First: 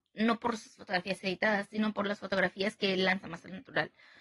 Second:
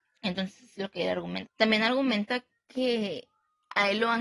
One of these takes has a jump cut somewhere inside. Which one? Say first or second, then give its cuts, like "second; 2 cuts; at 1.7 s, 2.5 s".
second; 1 cut; at 1.4 s